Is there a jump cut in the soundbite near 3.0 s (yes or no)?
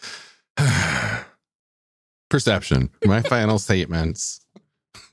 yes